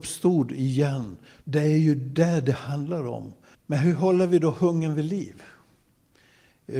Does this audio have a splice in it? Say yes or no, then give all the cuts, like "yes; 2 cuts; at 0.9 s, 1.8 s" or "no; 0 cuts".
yes; 2 cuts; at 1.4 s, 3.5 s